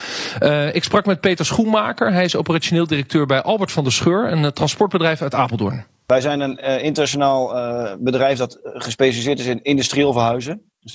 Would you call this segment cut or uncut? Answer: uncut